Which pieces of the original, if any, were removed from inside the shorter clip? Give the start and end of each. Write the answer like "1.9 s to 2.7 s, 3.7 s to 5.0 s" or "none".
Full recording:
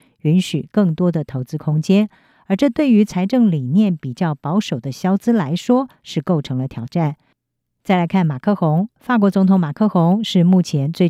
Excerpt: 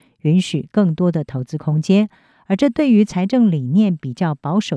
none